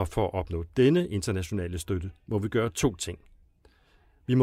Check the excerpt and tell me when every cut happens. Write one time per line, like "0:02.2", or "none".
none